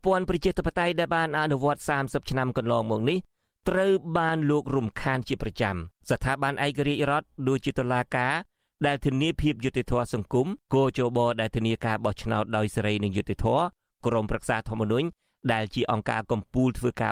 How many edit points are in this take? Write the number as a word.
two